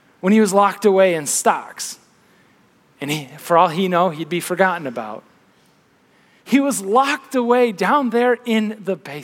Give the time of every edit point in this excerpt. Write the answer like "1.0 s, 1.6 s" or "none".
none

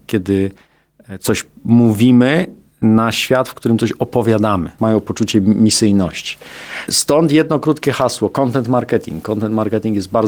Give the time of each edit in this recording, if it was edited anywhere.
4.8 s

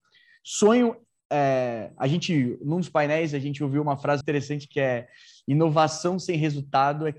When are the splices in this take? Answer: 4.2 s

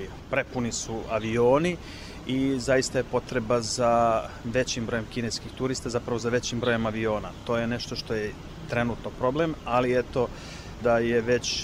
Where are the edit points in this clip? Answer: none

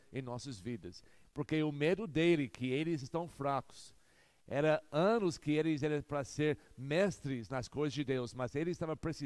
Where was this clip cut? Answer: 1.2 s

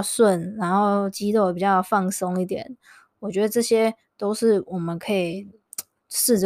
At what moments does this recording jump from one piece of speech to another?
none

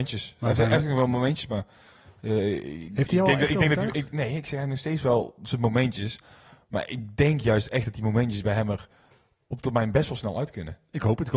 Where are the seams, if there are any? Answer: none

